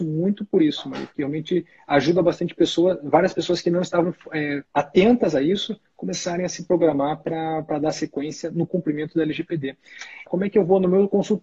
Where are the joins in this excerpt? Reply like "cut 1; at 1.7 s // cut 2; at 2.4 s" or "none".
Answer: cut 1; at 4.6 s // cut 2; at 10.3 s